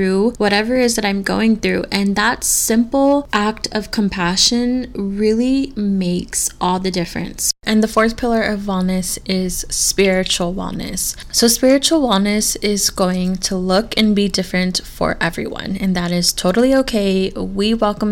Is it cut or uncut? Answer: uncut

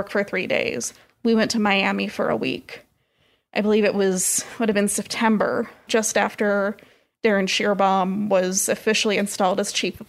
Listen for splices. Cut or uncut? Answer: cut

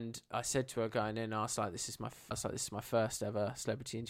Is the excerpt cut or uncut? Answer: cut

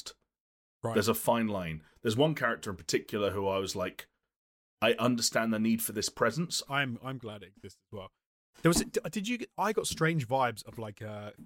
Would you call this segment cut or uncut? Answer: cut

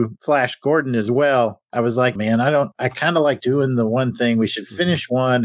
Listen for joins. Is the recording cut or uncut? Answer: cut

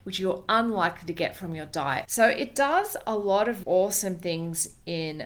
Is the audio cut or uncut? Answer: cut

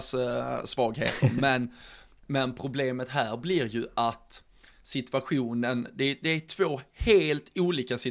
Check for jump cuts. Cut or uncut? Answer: uncut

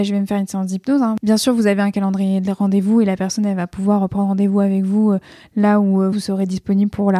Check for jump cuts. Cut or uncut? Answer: cut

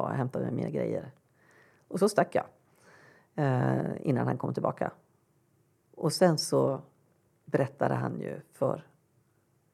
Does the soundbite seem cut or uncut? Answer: uncut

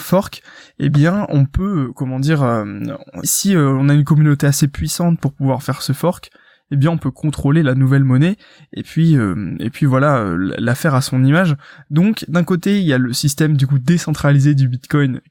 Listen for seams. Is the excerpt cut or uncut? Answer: cut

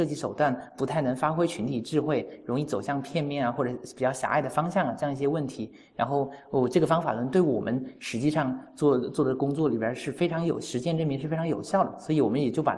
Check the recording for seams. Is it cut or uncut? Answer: uncut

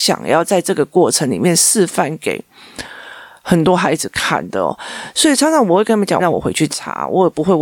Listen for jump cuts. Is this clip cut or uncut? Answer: cut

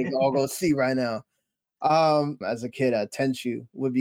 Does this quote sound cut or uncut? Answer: cut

